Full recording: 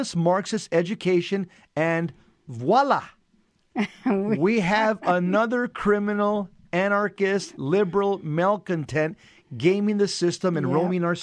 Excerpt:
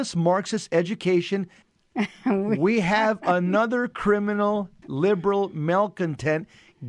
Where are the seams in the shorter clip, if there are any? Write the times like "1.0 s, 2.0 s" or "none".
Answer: 1.6 s, 4.8 s